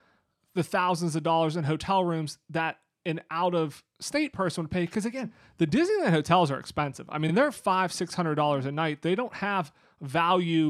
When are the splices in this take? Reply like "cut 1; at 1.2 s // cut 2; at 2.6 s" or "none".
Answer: none